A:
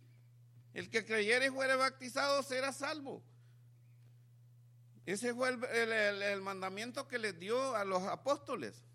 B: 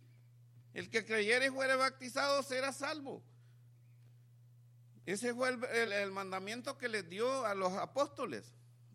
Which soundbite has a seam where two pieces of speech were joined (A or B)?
B